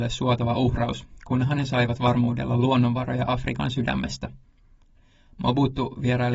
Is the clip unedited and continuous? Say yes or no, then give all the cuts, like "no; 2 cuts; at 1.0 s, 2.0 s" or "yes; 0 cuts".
yes; 0 cuts